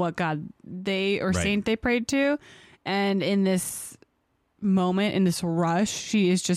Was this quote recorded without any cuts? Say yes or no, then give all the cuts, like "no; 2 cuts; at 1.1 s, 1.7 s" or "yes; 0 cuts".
yes; 0 cuts